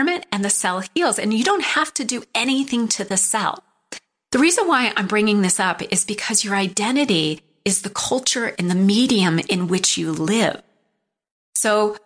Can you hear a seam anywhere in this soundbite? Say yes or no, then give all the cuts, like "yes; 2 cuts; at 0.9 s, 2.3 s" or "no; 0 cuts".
no; 0 cuts